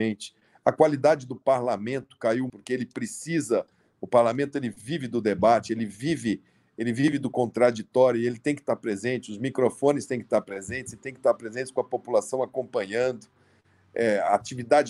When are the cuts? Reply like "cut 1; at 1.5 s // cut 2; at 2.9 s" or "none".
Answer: cut 1; at 2.5 s